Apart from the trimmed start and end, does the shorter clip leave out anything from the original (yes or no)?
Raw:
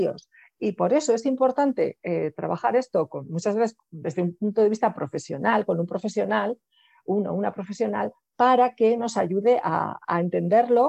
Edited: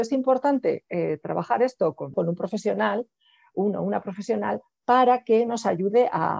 yes